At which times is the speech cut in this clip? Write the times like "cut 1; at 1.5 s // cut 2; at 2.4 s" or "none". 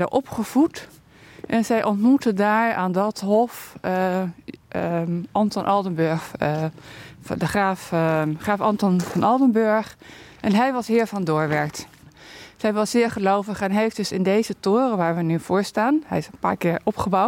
none